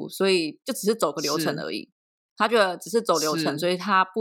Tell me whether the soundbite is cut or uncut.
uncut